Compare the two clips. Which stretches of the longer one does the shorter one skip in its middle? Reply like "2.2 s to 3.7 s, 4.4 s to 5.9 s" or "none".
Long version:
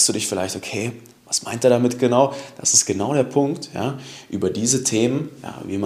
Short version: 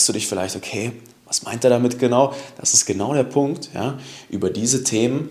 none